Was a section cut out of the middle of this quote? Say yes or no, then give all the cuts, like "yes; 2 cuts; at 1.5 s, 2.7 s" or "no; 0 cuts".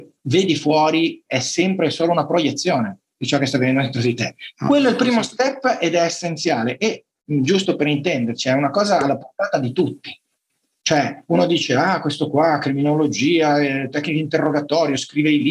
yes; 1 cut; at 4.5 s